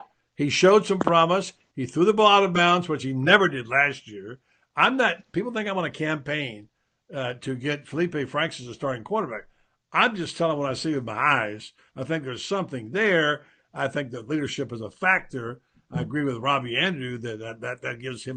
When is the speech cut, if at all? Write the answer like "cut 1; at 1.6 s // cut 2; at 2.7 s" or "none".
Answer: none